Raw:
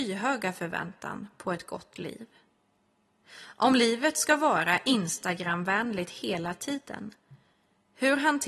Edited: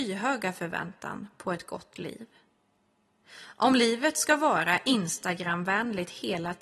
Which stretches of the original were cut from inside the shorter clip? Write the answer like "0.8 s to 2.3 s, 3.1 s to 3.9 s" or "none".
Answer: none